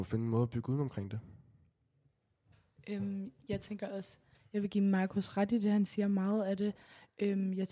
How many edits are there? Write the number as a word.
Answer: zero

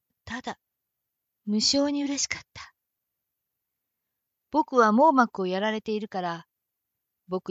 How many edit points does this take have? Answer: zero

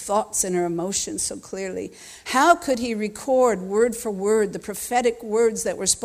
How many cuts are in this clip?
zero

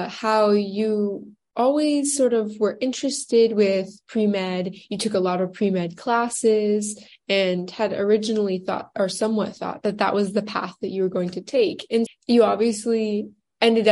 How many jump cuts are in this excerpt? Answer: one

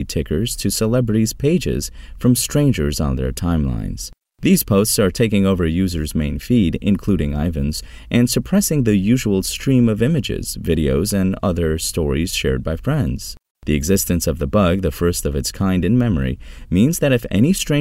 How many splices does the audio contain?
zero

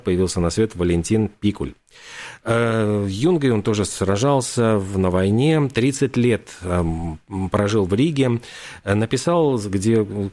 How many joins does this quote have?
zero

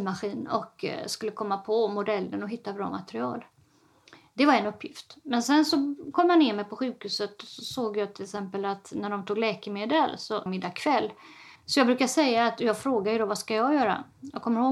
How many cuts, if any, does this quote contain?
two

